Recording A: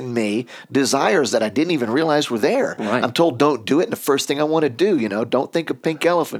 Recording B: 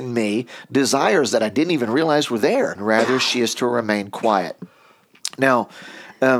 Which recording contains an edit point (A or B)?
B